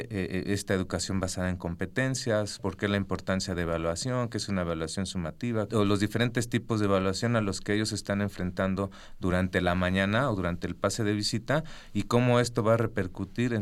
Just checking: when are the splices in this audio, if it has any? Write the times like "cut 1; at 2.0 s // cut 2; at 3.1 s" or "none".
cut 1; at 2.6 s // cut 2; at 5.7 s